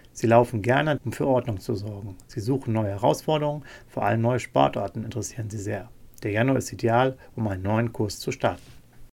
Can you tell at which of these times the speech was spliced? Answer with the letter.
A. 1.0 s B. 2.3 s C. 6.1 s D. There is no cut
A